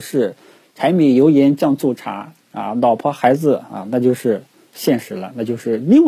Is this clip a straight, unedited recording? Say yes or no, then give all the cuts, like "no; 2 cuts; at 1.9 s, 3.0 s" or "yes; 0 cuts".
yes; 0 cuts